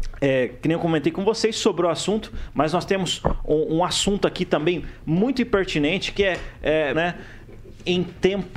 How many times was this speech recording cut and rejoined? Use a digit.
1